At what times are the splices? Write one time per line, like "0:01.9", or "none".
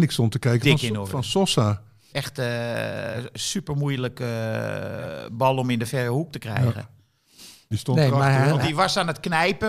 0:02.1
0:07.7